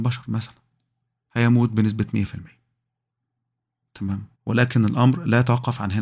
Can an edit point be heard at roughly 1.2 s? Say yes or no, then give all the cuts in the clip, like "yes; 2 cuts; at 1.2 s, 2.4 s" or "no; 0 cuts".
no; 1 cut; at 4.3 s